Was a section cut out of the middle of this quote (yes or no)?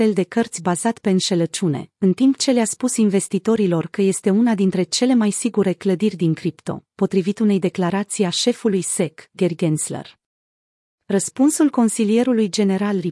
no